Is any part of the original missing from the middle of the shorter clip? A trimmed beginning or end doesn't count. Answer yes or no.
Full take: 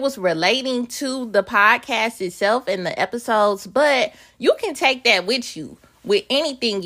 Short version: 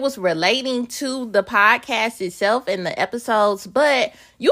no